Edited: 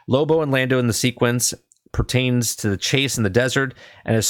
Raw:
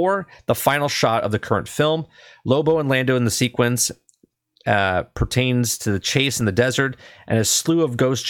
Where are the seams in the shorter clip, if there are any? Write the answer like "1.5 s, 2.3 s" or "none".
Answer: 1.9 s